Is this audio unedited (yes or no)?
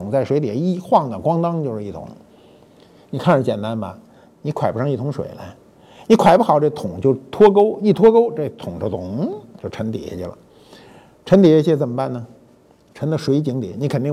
yes